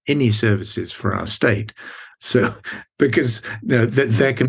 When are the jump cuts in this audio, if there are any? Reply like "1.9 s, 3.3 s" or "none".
2.1 s